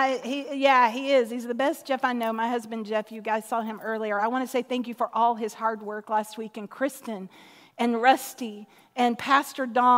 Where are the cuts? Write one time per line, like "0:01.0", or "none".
none